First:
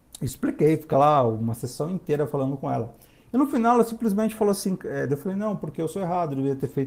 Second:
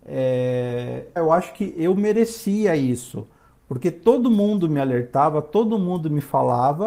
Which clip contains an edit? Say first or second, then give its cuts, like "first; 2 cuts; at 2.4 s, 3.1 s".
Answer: second; 1 cut; at 1.2 s